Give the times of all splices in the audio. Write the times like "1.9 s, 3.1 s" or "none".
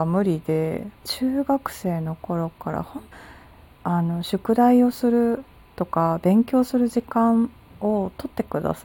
0.9 s